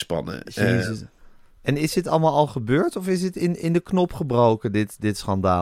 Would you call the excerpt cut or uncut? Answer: uncut